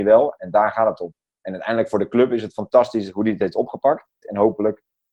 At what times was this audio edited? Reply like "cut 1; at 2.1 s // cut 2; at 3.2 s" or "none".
cut 1; at 4.2 s